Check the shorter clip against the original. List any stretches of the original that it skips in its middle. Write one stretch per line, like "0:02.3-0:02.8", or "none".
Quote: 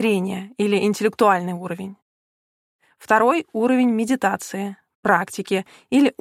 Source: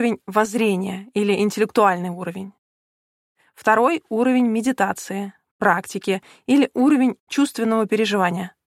none